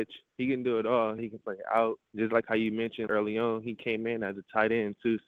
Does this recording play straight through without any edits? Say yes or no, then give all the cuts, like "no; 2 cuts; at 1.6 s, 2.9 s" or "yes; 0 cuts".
no; 2 cuts; at 1.2 s, 3.1 s